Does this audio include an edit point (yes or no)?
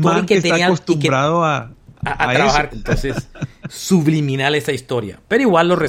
yes